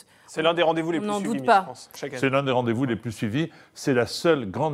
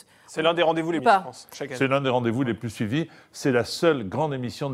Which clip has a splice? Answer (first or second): second